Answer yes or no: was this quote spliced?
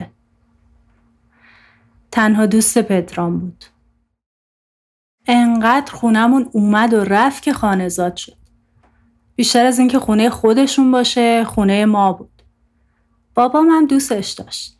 no